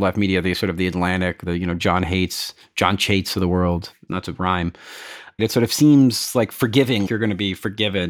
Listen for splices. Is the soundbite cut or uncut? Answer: cut